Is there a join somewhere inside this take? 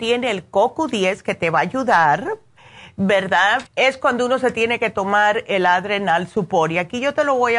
yes; 1 cut; at 3.7 s

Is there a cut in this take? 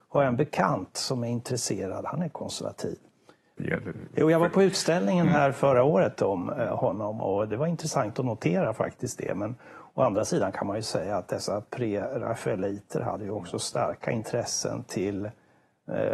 yes; 1 cut; at 3.6 s

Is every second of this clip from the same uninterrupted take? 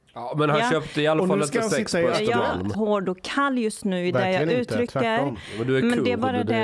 no; 1 cut; at 2.7 s

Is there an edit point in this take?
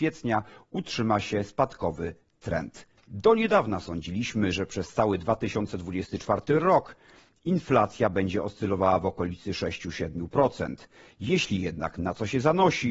yes; 1 cut; at 3.0 s

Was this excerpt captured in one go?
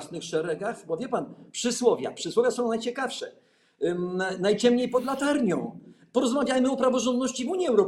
yes; 0 cuts

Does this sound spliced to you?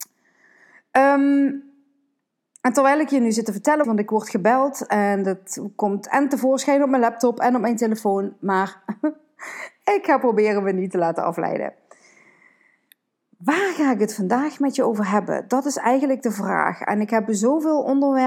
yes; 1 cut; at 3.8 s

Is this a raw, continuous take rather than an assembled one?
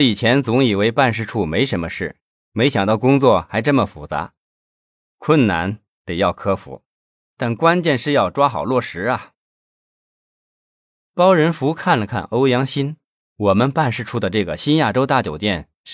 no; 1 cut; at 13.2 s

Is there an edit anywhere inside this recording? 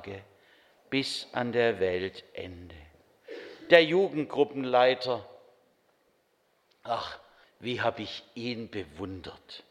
yes; 1 cut; at 7.4 s

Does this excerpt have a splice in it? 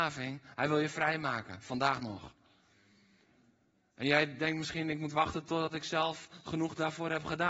no; 0 cuts

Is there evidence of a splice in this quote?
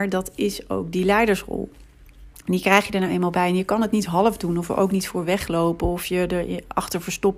no; 0 cuts

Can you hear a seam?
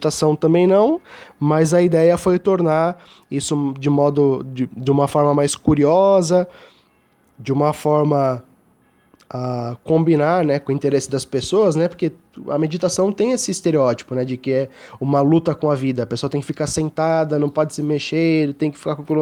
no; 0 cuts

